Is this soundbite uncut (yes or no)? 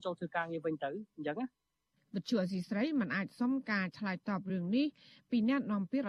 yes